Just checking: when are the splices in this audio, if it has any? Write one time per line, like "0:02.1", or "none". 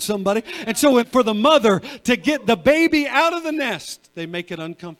0:01.0